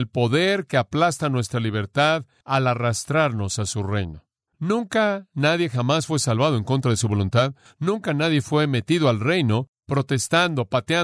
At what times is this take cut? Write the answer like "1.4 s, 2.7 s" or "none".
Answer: 4.5 s